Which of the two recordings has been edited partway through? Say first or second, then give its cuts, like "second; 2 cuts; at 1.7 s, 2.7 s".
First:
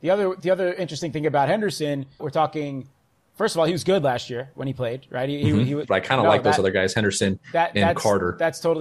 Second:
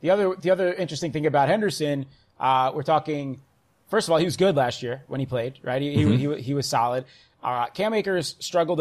first; 2 cuts; at 2.2 s, 5.8 s